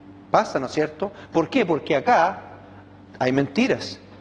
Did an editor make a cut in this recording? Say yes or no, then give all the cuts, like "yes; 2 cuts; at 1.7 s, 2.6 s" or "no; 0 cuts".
no; 0 cuts